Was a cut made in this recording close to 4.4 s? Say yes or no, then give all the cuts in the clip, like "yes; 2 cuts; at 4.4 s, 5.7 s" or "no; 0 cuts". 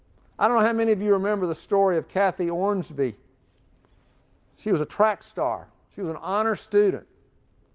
no; 0 cuts